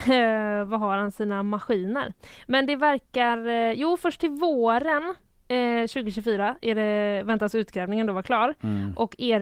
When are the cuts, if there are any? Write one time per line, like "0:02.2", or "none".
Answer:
none